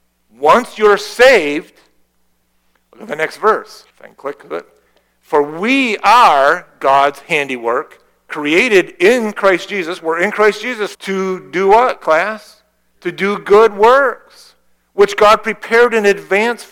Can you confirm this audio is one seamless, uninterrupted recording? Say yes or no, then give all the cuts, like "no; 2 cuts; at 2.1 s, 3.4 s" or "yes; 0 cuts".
no; 2 cuts; at 3.9 s, 10.9 s